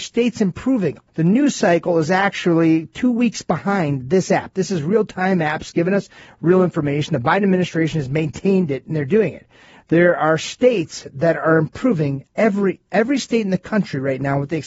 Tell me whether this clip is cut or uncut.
cut